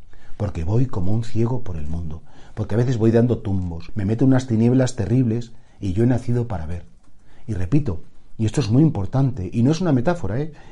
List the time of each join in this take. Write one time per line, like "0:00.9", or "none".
0:03.9